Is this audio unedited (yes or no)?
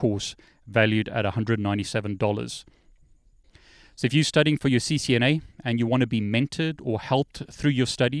yes